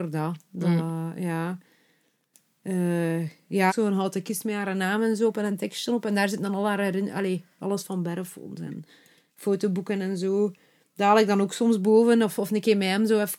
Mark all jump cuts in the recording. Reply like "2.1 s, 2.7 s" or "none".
3.7 s